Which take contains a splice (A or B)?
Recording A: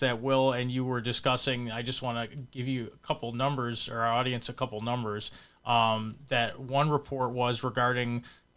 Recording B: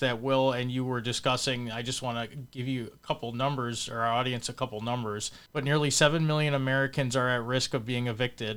B